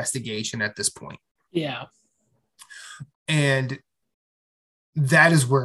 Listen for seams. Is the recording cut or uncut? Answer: cut